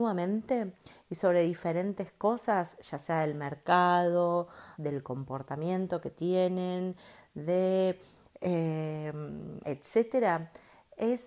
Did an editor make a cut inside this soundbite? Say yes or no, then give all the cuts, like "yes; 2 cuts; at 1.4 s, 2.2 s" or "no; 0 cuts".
yes; 2 cuts; at 4.7 s, 9.6 s